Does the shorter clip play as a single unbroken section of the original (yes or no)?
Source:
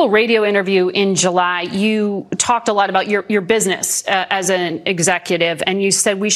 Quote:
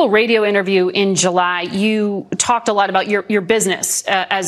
yes